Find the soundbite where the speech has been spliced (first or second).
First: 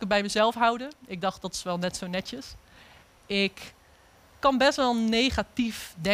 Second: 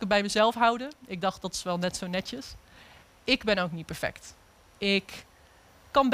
first